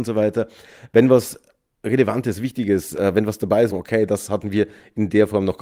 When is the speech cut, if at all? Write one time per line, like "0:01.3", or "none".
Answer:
0:03.7